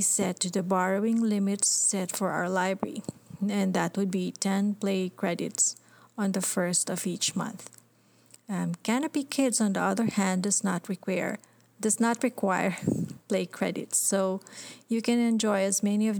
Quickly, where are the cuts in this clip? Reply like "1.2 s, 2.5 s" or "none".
none